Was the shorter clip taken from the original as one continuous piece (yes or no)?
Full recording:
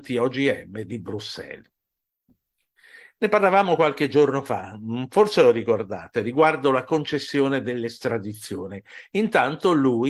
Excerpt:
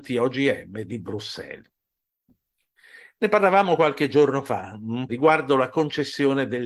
no